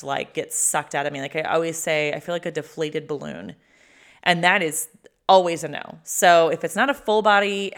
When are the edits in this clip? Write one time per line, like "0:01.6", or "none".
none

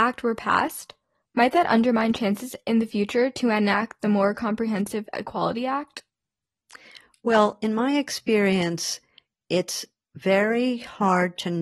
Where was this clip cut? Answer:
none

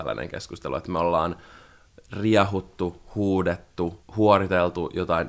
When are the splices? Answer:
0:04.0

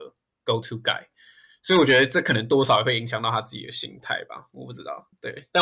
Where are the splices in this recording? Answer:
none

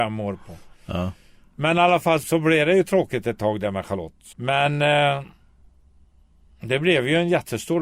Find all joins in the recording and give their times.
0:02.2
0:04.3

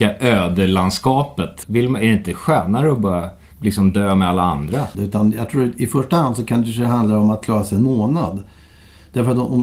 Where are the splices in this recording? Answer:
0:01.6
0:04.9

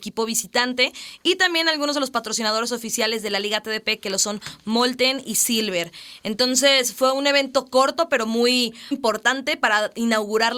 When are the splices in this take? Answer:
0:08.9

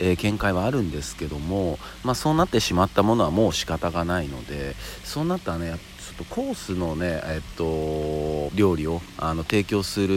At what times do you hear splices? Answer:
0:08.5

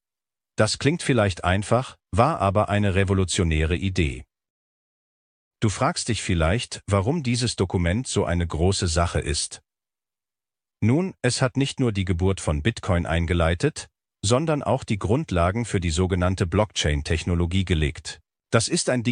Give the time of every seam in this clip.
none

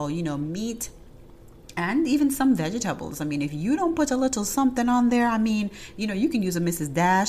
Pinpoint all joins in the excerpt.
none

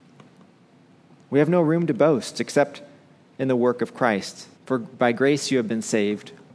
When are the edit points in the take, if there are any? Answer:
0:04.5

